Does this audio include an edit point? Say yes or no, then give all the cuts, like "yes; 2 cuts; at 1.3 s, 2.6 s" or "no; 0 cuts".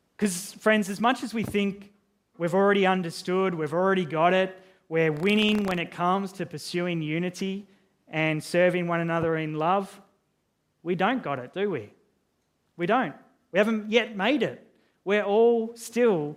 no; 0 cuts